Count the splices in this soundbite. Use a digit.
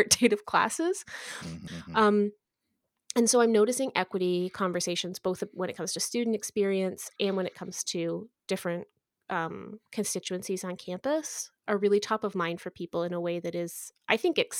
1